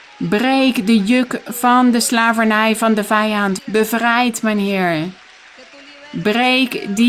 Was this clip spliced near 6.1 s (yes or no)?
no